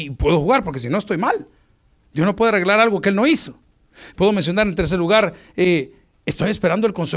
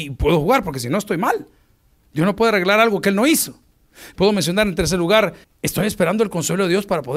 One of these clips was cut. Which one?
second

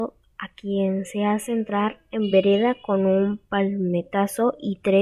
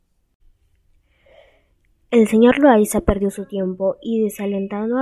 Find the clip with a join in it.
first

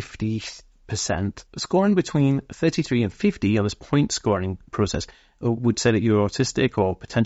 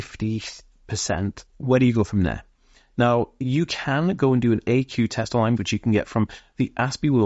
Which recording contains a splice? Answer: second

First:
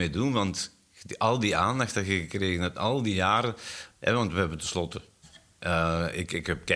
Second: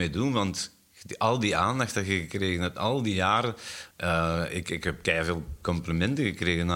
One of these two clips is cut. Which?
second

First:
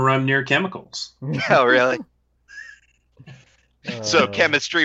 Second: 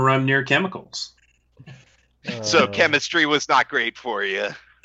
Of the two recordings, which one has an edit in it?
second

